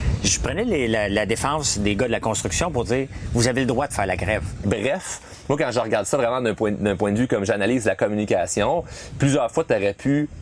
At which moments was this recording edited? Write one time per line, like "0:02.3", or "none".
0:04.6